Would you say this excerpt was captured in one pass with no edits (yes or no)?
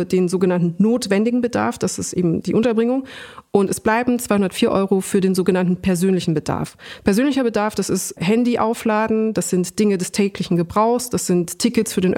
yes